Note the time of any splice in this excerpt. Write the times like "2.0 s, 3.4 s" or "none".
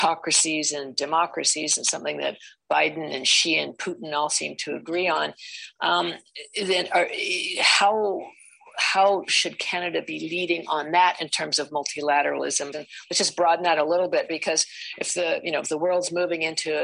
12.7 s